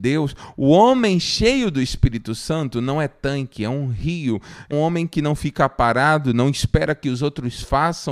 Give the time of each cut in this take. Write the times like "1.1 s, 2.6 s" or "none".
4.7 s

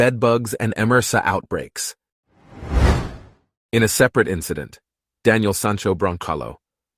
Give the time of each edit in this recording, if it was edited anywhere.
none

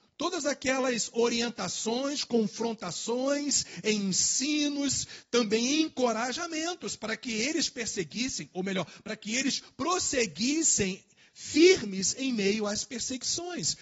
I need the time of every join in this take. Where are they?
none

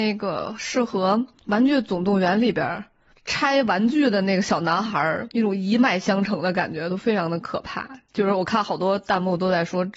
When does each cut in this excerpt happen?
5.3 s

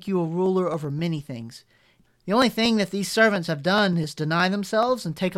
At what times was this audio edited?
2.1 s

